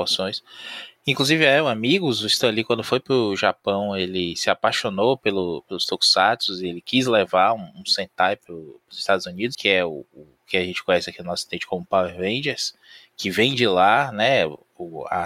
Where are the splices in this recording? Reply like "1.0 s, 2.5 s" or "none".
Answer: 9.5 s